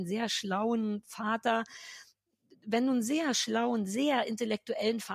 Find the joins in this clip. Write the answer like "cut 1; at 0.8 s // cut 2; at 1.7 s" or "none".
none